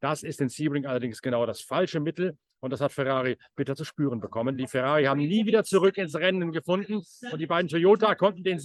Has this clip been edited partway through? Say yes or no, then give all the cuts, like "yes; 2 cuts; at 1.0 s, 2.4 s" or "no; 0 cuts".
no; 0 cuts